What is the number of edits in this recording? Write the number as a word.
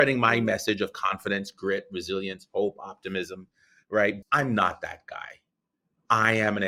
one